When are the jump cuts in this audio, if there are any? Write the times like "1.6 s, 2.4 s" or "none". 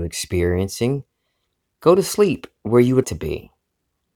1.6 s, 3.0 s